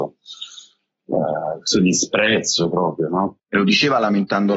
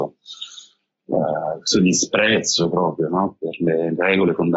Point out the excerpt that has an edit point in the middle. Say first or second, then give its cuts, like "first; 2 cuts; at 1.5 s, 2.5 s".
first; 1 cut; at 3.4 s